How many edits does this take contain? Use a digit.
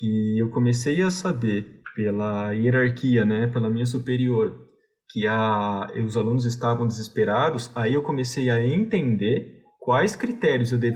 0